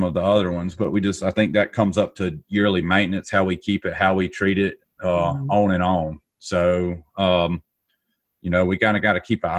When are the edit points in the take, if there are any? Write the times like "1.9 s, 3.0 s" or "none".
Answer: none